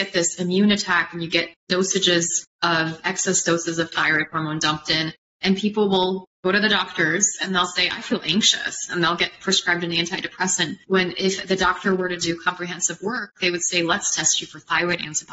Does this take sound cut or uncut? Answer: uncut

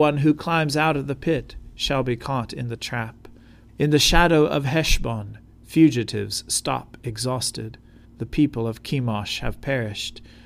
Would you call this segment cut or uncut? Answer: cut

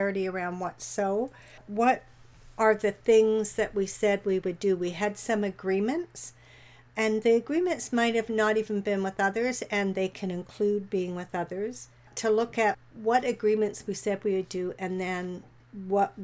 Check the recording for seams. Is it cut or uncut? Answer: uncut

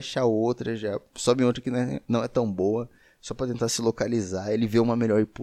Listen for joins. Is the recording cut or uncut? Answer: uncut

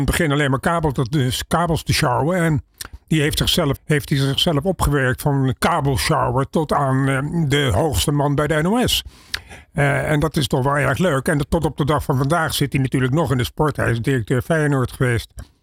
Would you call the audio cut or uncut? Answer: cut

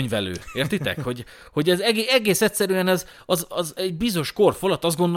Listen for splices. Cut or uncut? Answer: uncut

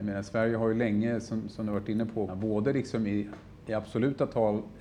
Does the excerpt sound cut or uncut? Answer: cut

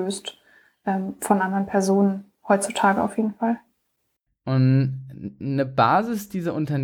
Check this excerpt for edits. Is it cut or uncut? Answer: cut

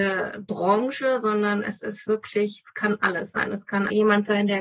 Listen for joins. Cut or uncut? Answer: uncut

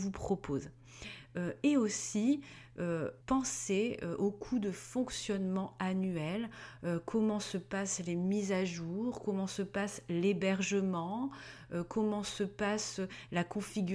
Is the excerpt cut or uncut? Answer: cut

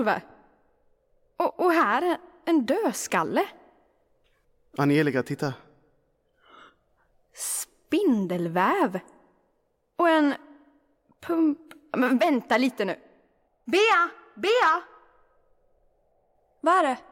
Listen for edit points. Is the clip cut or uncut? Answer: uncut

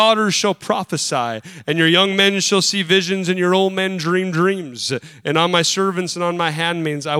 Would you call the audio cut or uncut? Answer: uncut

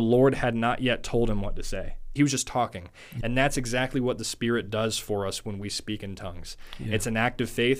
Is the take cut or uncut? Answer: cut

